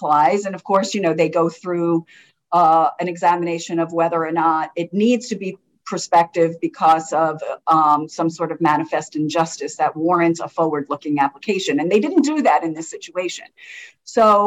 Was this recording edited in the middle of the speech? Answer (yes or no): no